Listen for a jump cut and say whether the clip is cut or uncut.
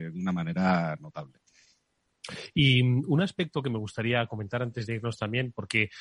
uncut